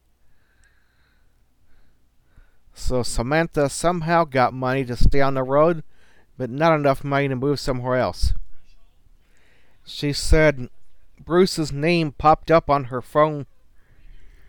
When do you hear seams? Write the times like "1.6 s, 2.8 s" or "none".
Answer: 9.8 s, 11.1 s